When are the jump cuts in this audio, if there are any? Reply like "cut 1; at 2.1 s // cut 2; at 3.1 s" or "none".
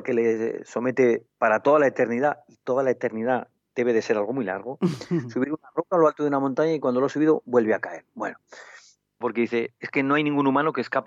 cut 1; at 9.2 s